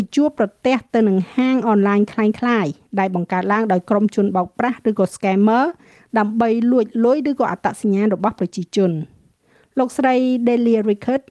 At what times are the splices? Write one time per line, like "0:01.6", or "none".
none